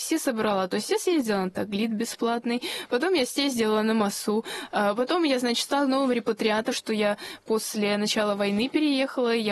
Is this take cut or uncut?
cut